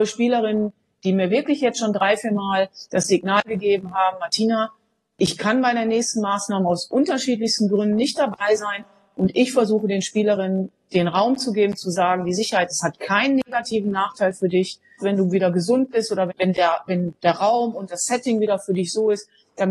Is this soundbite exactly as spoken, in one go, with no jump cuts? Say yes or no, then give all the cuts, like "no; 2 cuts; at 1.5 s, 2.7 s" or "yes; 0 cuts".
no; 2 cuts; at 15.0 s, 16.3 s